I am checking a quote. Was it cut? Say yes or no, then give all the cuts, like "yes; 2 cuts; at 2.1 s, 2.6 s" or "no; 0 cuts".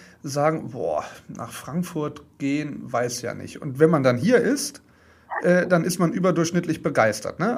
no; 0 cuts